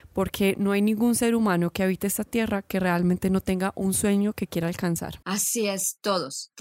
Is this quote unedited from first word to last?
no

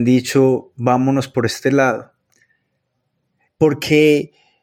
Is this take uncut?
no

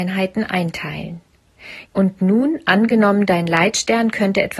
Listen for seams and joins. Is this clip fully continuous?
no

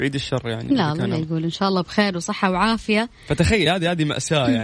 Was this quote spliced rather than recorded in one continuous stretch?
no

